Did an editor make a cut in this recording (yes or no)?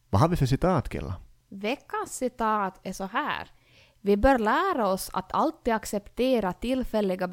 no